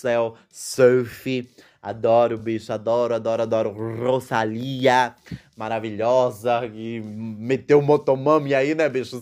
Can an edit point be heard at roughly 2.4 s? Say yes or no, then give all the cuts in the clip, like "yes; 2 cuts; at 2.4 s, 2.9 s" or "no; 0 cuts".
no; 0 cuts